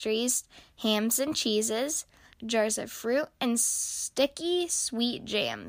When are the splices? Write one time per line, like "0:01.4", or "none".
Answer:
0:02.3